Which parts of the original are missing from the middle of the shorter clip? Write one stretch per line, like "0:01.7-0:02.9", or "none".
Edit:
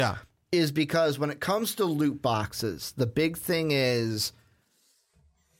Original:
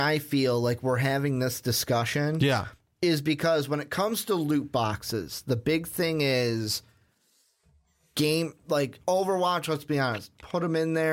none